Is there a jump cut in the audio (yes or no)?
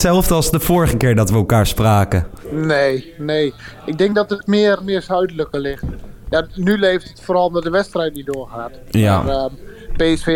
yes